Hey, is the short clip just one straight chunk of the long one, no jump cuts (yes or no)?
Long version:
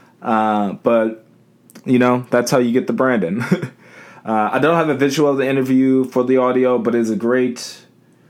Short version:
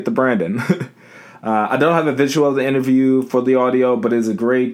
yes